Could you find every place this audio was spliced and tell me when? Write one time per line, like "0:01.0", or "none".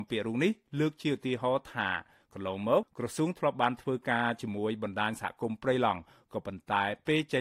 0:02.8